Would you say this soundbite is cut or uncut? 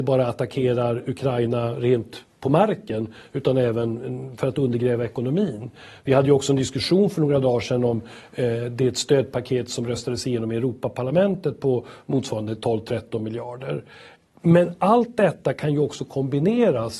uncut